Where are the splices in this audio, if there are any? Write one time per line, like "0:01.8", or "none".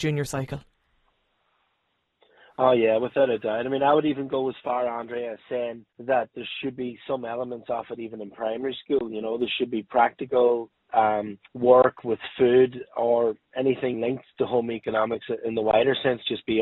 0:05.9
0:11.5
0:13.9